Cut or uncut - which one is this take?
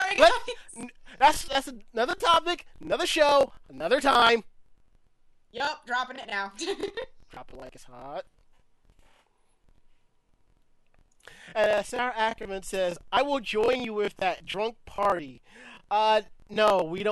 uncut